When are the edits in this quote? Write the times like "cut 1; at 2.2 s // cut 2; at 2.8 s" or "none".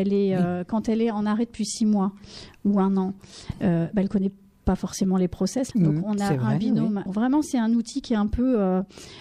cut 1; at 5.7 s // cut 2; at 7.1 s